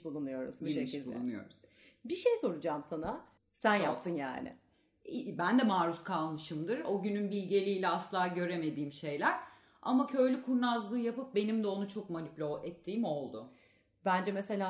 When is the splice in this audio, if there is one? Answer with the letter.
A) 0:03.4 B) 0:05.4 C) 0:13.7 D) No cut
A